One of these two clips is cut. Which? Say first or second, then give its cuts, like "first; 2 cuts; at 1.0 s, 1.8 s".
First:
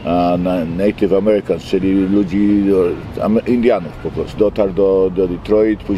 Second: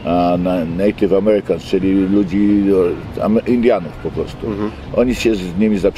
first; 1 cut; at 4.4 s